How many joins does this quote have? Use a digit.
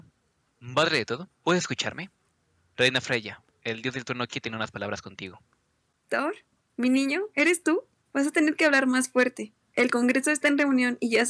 0